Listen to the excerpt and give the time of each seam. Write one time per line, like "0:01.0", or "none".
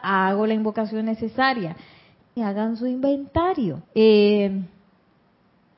0:02.4
0:03.8